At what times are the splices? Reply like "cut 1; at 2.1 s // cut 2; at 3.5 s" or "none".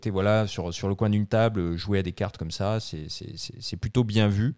none